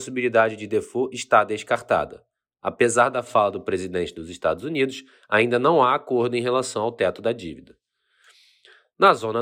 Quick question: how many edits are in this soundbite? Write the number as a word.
zero